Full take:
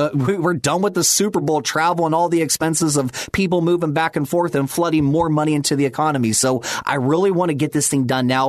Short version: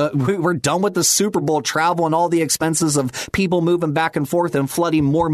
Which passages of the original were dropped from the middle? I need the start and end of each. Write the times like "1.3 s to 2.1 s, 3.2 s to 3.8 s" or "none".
none